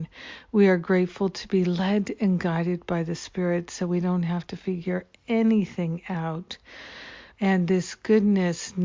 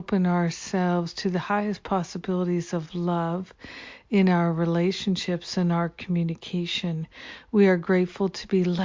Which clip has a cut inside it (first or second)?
first